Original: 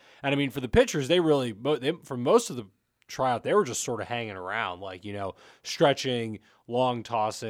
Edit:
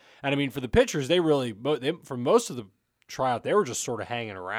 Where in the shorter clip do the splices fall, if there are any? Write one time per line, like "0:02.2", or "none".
none